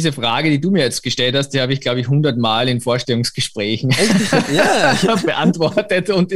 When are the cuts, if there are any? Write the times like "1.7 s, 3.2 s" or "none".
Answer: none